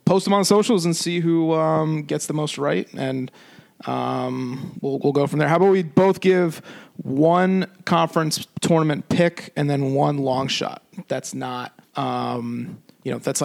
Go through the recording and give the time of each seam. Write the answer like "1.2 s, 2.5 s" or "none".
11.9 s